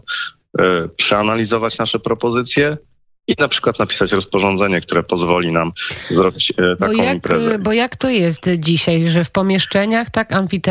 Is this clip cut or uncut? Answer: uncut